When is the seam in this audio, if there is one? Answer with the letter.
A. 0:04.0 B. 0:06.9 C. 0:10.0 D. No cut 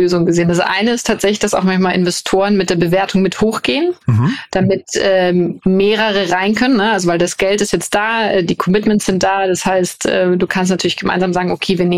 A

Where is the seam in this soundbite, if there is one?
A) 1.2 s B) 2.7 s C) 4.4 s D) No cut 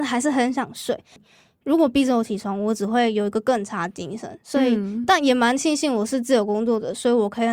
A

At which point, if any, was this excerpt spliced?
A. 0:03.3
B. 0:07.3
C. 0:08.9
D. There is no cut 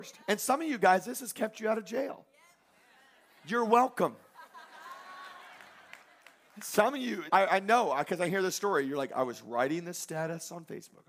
B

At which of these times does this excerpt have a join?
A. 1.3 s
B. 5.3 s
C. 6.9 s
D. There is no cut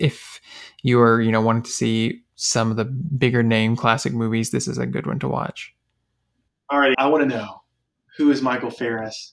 C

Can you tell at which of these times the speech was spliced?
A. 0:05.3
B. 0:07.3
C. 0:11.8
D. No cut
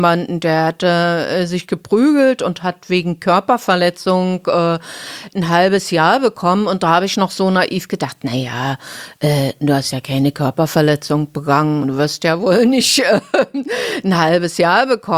D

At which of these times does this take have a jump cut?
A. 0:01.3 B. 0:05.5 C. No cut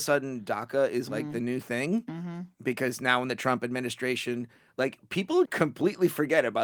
B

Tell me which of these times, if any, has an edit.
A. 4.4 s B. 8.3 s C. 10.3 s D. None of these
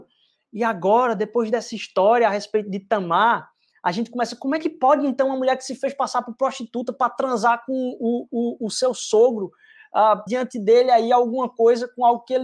C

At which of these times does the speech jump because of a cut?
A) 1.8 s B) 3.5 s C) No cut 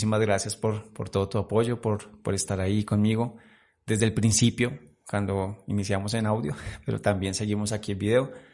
C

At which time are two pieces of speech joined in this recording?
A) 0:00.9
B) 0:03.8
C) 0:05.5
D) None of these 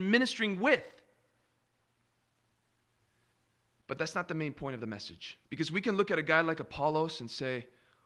C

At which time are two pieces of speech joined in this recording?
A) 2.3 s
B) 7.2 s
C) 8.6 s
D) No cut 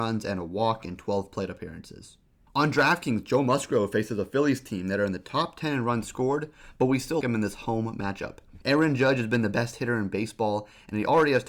B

